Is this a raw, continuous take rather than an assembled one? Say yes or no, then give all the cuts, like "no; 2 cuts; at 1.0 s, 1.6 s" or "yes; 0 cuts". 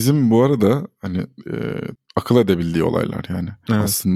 no; 1 cut; at 2.0 s